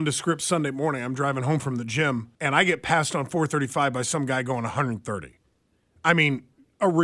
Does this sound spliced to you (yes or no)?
yes